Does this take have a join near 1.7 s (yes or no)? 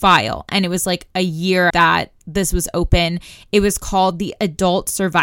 yes